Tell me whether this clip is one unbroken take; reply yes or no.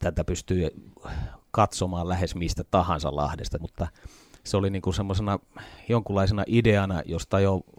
no